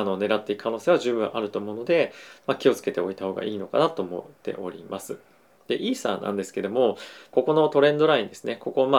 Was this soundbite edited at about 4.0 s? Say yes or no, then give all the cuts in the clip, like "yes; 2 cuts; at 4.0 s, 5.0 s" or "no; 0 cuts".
no; 2 cuts; at 5.6 s, 7.3 s